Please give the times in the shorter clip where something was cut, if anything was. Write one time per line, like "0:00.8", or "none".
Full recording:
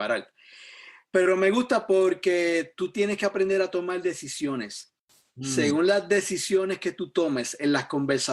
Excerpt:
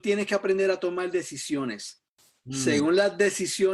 none